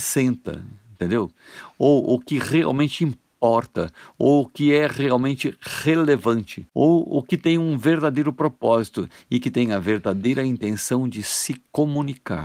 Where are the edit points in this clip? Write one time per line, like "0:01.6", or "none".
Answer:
none